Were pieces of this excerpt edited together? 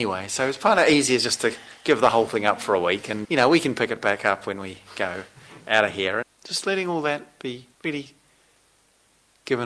yes; 3 cuts; at 3.2 s, 6.2 s, 7.7 s

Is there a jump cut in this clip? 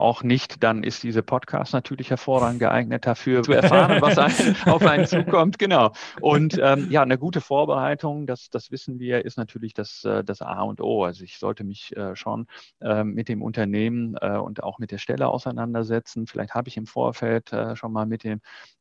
yes; 1 cut; at 3.4 s

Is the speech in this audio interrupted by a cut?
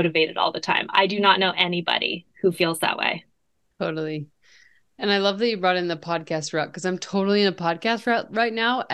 no; 0 cuts

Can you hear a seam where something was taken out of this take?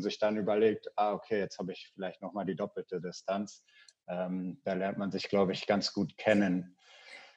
no; 0 cuts

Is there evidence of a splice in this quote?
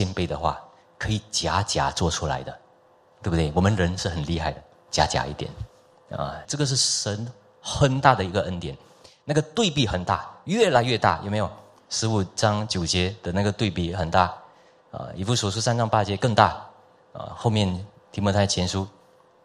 yes; 1 cut; at 6.4 s

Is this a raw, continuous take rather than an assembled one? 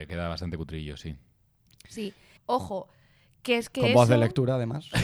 no; 1 cut; at 2.4 s

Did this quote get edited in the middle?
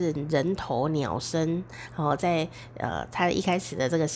no; 0 cuts

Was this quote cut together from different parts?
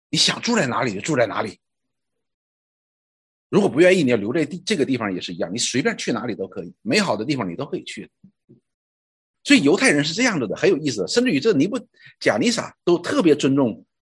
no; 0 cuts

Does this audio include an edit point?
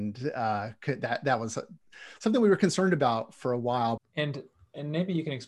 yes; 1 cut; at 4.0 s

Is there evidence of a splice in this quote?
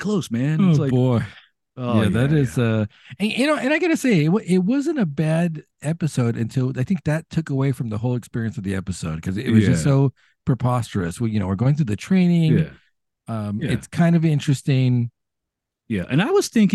no; 0 cuts

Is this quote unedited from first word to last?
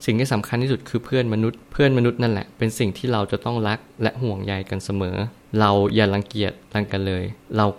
no; 1 cut; at 6.9 s

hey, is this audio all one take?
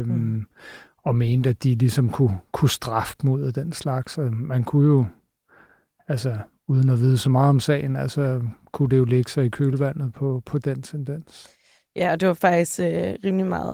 yes; 0 cuts

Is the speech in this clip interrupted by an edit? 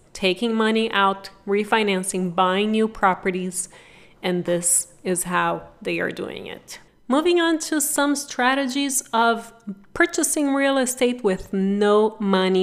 no; 0 cuts

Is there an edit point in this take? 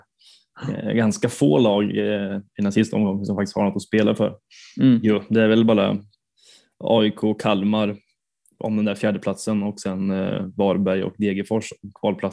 no; 0 cuts

